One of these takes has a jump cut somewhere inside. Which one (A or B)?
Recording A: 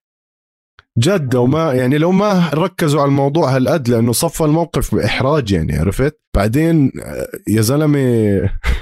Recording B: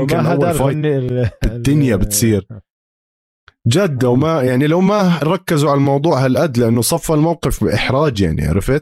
A